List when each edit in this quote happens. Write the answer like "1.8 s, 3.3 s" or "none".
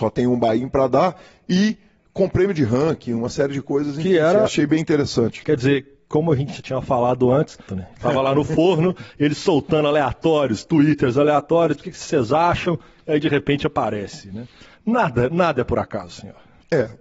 5.4 s, 7.7 s